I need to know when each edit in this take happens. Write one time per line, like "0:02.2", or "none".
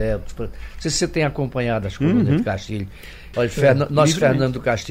0:03.3